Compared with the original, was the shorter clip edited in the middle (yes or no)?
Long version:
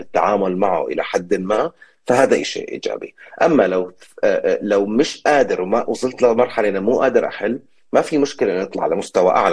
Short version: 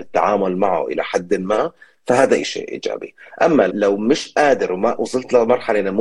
yes